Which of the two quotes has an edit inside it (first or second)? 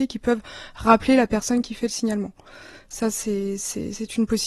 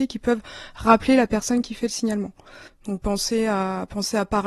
second